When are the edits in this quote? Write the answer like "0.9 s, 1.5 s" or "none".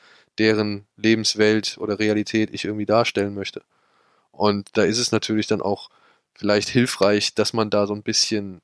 none